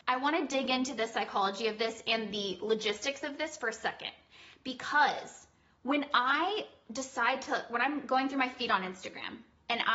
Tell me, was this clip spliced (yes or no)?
no